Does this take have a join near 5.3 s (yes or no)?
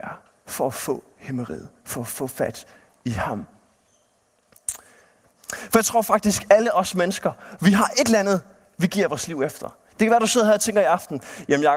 yes